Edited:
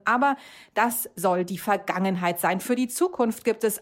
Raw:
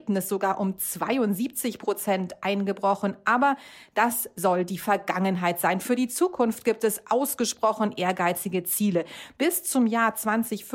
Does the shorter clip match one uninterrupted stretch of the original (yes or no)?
yes